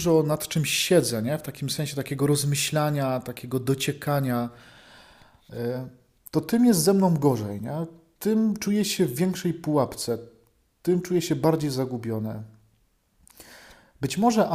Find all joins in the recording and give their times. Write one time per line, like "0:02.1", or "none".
none